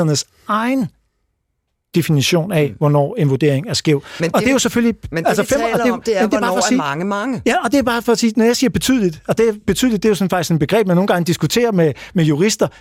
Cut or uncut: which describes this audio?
uncut